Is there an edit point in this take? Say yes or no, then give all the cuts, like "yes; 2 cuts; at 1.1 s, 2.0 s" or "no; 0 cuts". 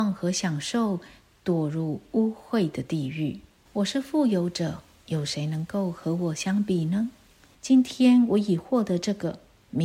yes; 3 cuts; at 3.7 s, 5.0 s, 7.5 s